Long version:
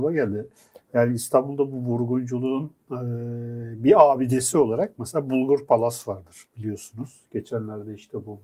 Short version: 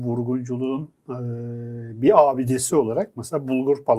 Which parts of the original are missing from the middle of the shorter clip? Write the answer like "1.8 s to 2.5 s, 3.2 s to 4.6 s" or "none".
none